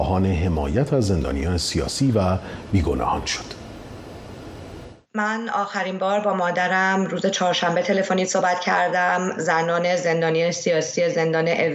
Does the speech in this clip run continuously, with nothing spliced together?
no; 1 cut; at 5.0 s

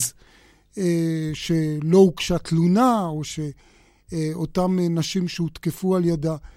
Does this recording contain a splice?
no; 0 cuts

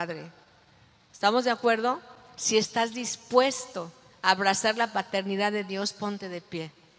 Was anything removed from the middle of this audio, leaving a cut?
no; 0 cuts

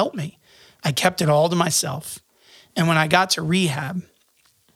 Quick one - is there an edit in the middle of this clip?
no; 0 cuts

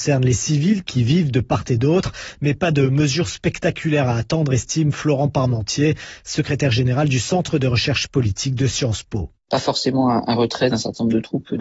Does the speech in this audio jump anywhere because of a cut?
no; 0 cuts

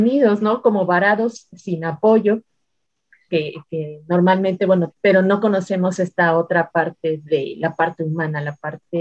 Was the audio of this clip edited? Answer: yes; 2 cuts; at 3.3 s, 4.9 s

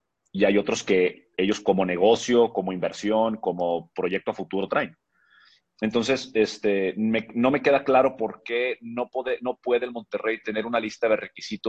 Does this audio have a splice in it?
no; 0 cuts

